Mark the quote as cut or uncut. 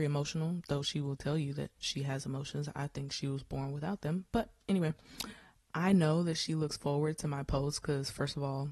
uncut